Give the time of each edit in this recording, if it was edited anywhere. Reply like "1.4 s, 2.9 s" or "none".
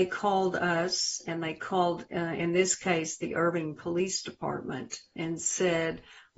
none